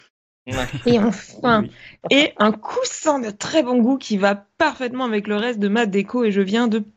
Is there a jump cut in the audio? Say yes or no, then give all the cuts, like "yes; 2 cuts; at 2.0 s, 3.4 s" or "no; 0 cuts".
yes; 1 cut; at 2.0 s